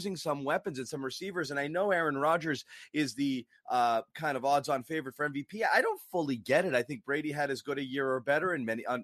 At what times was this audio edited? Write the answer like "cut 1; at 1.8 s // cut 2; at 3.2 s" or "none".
none